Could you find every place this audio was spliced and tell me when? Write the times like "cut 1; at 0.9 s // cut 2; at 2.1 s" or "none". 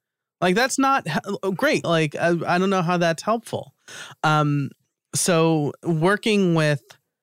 cut 1; at 1.8 s